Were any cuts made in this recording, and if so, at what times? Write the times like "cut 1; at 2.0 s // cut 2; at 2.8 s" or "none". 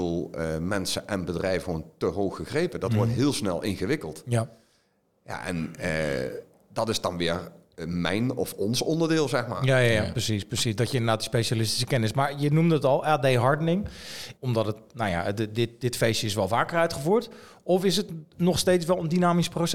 cut 1; at 14.3 s